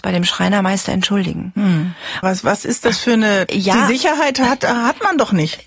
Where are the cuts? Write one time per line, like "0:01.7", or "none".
0:02.2
0:03.5